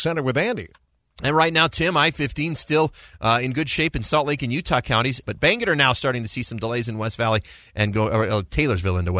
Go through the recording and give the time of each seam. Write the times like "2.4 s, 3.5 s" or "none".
5.2 s